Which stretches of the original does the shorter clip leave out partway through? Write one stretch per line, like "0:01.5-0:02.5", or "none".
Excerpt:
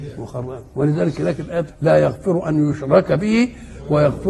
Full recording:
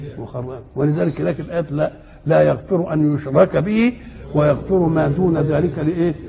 0:01.7-0:02.1